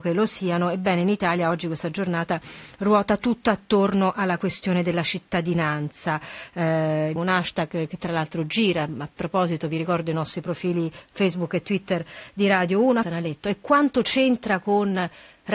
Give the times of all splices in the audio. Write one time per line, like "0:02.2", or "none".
0:07.2
0:13.0